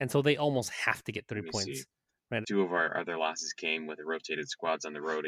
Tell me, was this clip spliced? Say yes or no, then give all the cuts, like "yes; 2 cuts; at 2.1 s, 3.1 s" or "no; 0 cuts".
yes; 1 cut; at 2.4 s